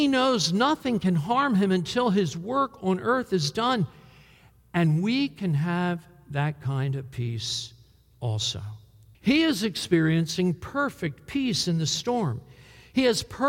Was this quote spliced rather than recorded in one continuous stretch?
yes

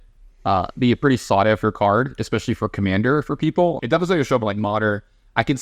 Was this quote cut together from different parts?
yes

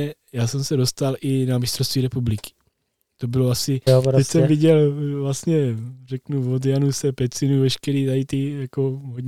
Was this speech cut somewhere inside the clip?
yes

